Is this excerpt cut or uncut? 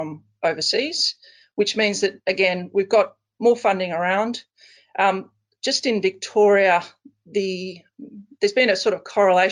cut